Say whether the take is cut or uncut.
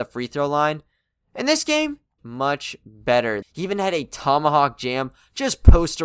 cut